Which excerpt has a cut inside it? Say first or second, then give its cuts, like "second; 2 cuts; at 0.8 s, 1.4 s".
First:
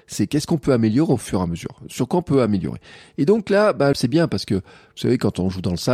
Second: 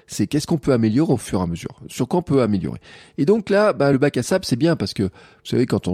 first; 1 cut; at 3.9 s